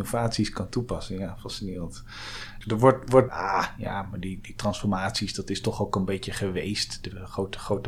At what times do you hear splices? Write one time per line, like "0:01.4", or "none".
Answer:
0:03.3